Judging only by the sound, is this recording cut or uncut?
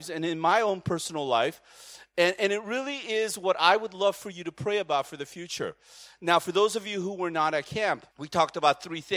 cut